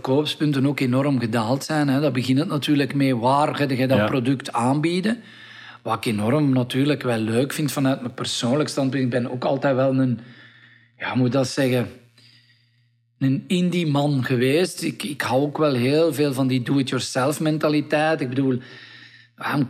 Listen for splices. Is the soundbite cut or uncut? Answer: uncut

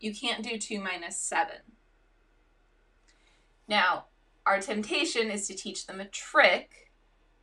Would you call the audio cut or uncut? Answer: uncut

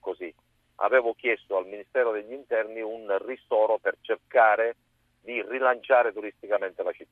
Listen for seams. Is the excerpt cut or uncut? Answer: uncut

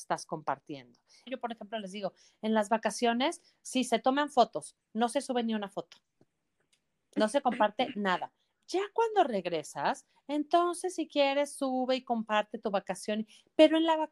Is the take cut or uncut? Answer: cut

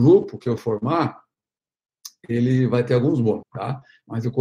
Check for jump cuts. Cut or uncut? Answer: cut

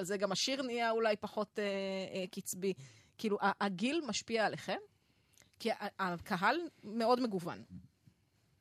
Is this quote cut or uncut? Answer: uncut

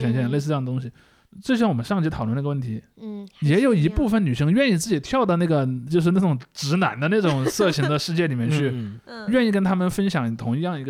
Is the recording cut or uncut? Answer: uncut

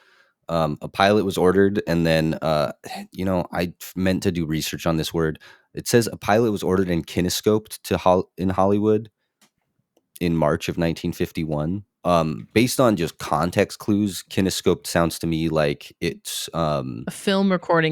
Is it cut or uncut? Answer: uncut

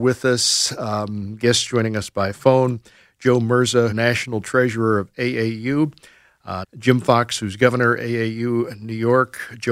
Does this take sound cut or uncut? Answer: cut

